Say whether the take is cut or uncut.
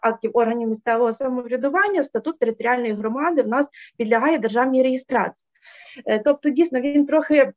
uncut